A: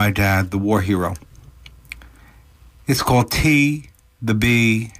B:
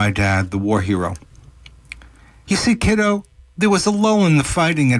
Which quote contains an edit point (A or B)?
B